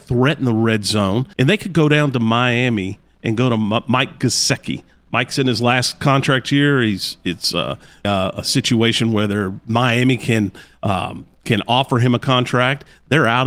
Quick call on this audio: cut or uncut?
cut